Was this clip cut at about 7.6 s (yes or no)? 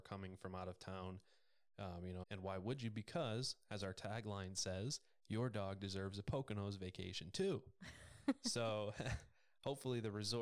no